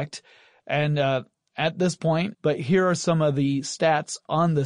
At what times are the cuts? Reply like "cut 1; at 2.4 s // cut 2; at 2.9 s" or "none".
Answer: cut 1; at 2.3 s